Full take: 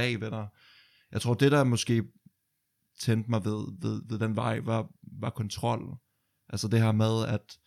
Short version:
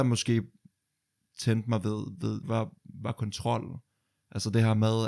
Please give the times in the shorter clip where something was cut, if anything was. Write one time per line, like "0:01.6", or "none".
0:02.4